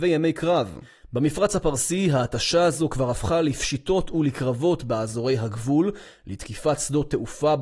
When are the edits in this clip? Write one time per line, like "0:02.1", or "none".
none